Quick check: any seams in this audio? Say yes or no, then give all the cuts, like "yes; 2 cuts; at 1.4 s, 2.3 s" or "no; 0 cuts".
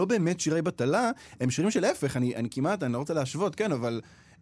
no; 0 cuts